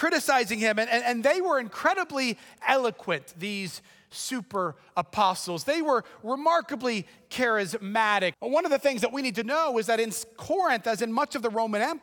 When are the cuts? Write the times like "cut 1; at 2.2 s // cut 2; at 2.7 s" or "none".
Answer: cut 1; at 8.3 s